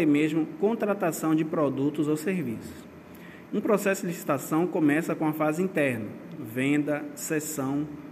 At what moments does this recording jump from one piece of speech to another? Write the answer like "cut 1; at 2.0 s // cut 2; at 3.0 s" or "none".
cut 1; at 3.5 s // cut 2; at 6.4 s